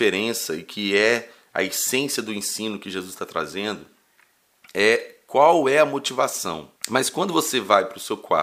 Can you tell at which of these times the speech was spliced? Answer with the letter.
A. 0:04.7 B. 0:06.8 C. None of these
B